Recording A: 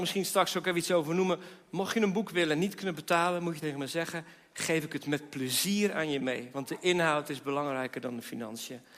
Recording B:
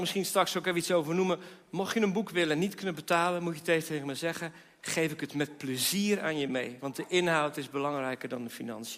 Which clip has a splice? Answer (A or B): A